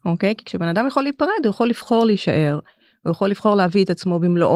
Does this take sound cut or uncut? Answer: uncut